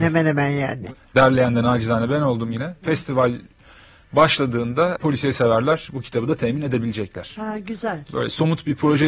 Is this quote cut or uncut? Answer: cut